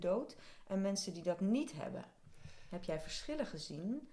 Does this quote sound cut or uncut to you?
uncut